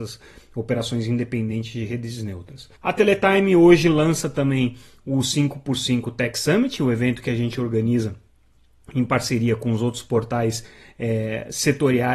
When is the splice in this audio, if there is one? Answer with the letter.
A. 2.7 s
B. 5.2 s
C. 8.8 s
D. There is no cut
A